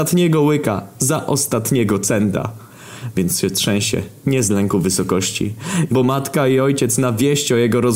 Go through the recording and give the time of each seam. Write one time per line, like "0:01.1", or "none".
0:05.9